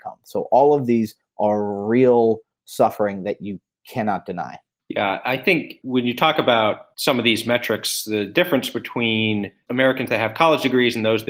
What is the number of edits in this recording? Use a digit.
0